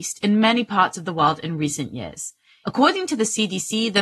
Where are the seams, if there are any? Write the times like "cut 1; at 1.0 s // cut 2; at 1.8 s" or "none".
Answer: cut 1; at 2.6 s